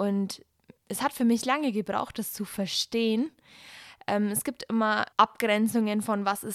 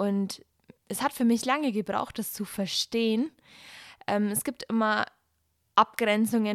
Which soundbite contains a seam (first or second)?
first